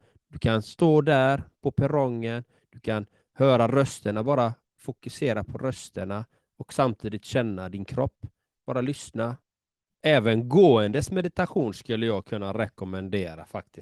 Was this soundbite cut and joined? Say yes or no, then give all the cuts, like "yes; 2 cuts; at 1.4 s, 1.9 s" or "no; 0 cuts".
yes; 1 cut; at 10.0 s